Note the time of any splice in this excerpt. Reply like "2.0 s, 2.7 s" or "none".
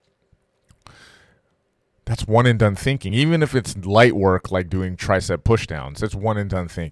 none

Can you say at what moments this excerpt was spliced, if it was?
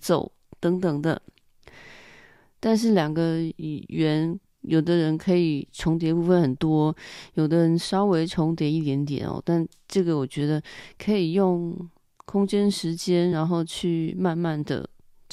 none

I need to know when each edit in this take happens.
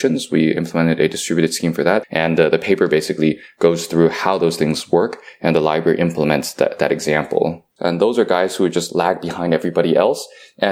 2.0 s, 7.8 s

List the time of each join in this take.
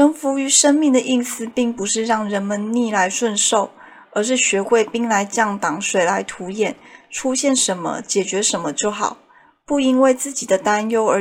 none

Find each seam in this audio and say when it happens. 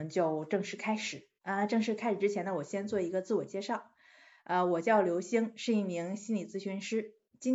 none

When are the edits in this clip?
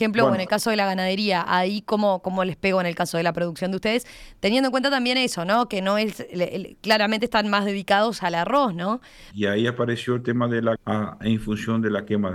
9.3 s, 10.8 s

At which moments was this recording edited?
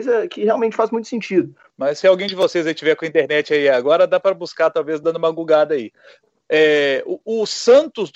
1.7 s

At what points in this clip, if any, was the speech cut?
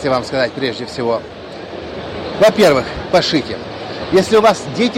3.1 s

